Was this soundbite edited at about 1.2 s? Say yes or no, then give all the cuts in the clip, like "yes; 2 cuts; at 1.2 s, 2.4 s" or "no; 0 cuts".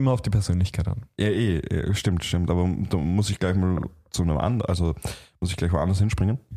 no; 0 cuts